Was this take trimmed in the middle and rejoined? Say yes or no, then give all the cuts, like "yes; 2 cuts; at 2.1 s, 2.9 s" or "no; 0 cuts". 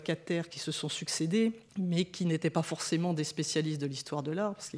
yes; 1 cut; at 1.7 s